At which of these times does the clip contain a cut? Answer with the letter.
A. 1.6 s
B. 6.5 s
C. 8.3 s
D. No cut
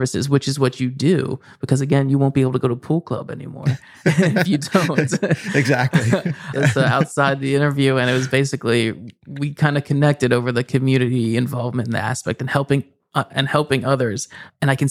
B